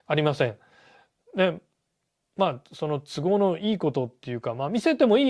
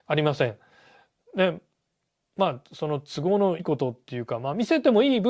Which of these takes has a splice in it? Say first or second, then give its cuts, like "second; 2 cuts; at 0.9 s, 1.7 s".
second; 1 cut; at 3.6 s